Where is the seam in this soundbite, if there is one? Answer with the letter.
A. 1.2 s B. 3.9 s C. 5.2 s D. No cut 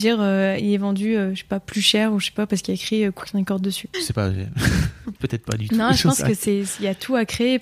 B